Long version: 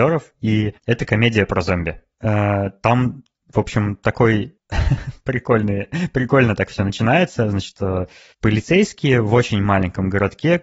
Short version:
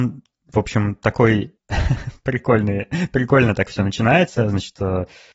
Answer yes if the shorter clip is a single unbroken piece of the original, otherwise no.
yes